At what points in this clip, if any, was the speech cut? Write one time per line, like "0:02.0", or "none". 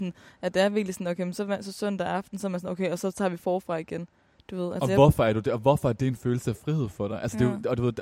none